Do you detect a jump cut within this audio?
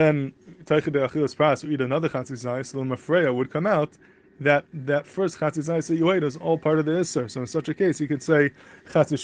no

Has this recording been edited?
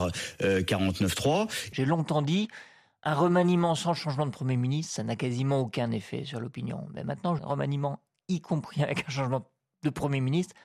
yes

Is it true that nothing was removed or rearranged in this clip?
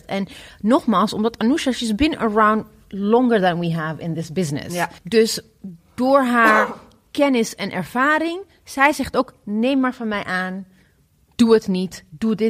no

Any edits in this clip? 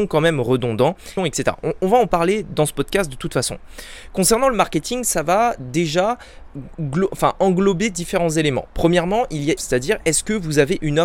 yes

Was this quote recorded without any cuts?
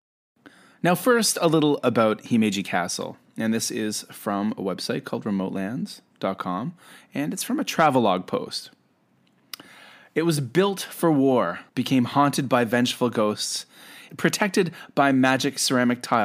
no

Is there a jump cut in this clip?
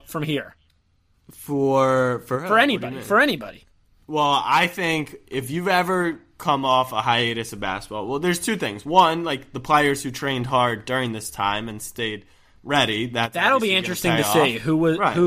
no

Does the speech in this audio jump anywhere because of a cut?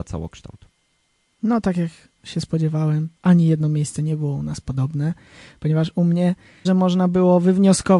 yes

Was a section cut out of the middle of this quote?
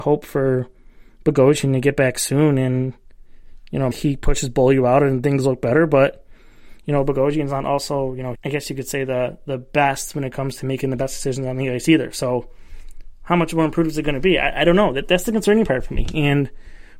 yes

